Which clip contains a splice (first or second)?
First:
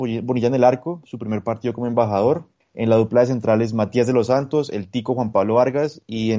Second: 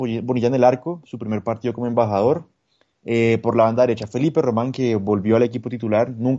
first